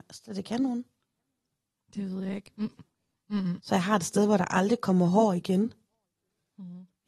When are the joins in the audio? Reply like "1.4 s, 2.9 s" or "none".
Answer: 2.5 s, 3.6 s